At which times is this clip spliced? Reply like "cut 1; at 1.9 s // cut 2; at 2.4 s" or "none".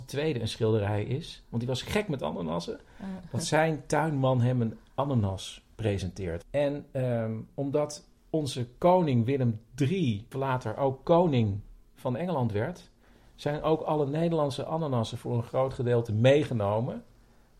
cut 1; at 6.4 s // cut 2; at 8.2 s // cut 3; at 10.3 s